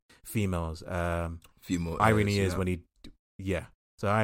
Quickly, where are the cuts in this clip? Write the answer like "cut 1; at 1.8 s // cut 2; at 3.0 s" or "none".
none